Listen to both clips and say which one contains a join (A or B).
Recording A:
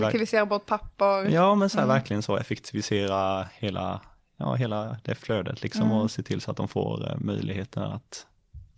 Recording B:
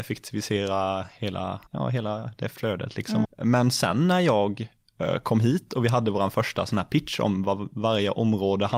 B